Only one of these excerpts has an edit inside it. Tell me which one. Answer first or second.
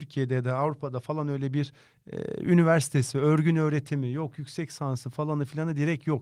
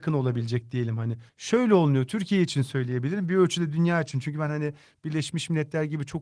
second